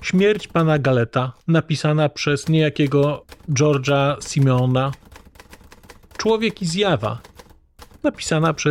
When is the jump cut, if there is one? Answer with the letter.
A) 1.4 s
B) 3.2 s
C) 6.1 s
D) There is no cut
A